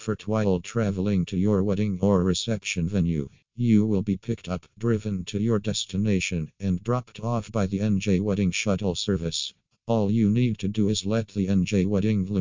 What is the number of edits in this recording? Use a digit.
1